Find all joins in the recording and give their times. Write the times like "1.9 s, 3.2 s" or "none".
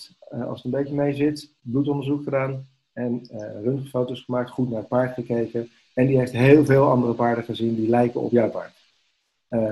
none